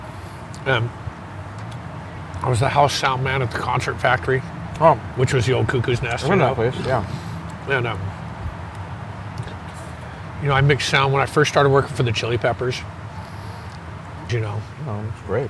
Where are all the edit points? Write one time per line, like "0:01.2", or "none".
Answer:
0:14.3